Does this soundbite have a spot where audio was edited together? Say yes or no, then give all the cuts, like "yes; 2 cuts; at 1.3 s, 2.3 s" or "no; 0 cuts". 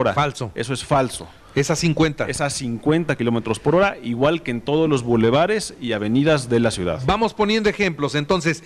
no; 0 cuts